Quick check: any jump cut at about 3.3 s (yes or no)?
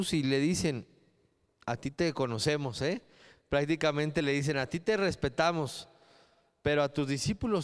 no